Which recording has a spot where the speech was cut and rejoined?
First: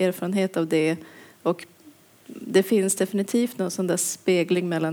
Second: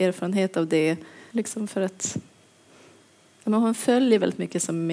second; 1 cut; at 1.3 s

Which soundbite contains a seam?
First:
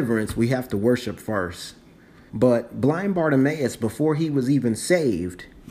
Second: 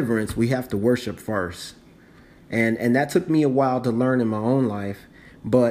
first; 1 cut; at 2.3 s

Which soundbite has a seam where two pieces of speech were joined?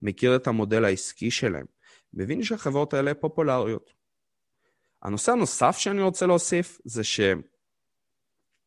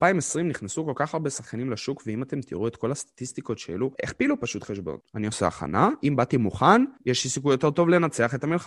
second; 3 cuts; at 3.9 s, 5.0 s, 7.0 s

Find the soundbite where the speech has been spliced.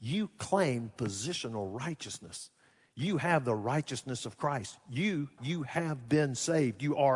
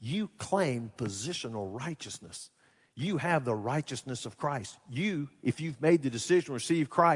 first; 1 cut; at 5.4 s

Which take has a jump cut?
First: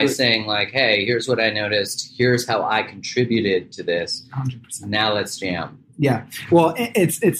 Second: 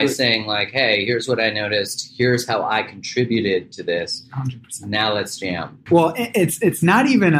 second; 1 cut; at 5.9 s

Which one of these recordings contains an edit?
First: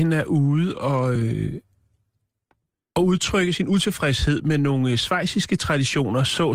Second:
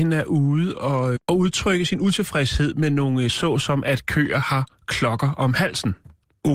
second; 2 cuts; at 1.2 s, 3.3 s

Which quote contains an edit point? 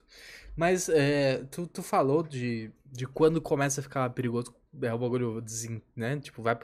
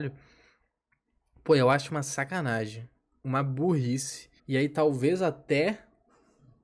second; 1 cut; at 4.4 s

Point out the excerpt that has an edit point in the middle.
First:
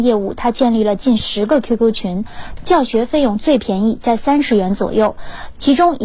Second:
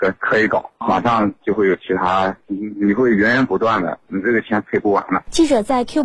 first; 1 cut; at 2.6 s

